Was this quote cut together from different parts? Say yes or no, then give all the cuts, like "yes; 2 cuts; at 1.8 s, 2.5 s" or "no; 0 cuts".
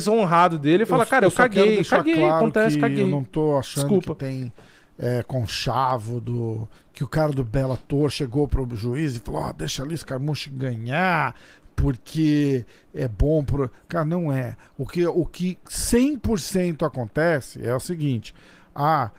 no; 0 cuts